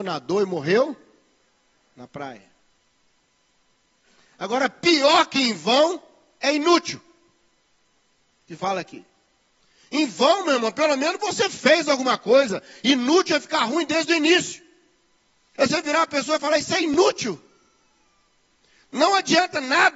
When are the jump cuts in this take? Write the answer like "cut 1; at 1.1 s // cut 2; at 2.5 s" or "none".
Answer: cut 1; at 15.5 s